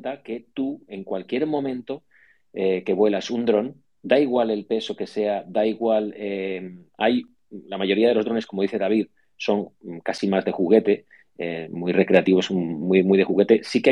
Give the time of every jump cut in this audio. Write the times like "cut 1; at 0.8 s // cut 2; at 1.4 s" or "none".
cut 1; at 6.9 s